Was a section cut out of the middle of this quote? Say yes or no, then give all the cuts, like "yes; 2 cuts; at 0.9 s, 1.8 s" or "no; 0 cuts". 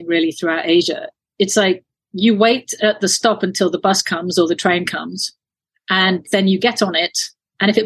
no; 0 cuts